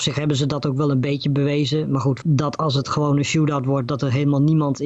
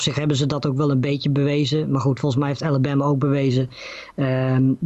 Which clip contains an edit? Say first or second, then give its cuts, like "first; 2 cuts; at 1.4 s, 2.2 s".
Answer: first; 1 cut; at 2.2 s